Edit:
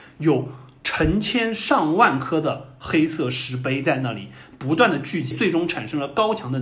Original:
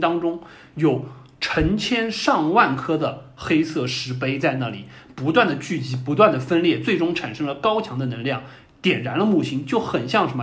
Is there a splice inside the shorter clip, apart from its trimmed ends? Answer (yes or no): yes